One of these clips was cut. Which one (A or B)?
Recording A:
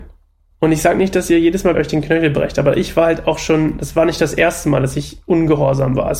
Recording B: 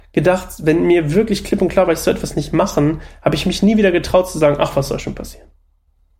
A